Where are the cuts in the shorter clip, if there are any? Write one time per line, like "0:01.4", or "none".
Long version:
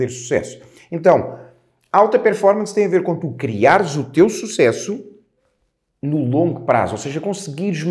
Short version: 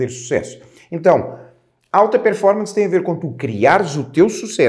none